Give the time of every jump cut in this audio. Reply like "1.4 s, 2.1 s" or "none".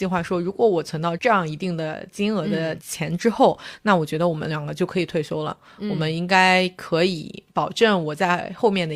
1.2 s